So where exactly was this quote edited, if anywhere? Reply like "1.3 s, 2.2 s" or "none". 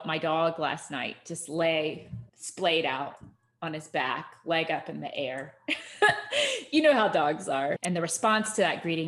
2.3 s, 7.8 s